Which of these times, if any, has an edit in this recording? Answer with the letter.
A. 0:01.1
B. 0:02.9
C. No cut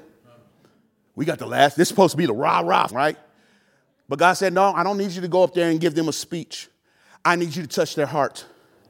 B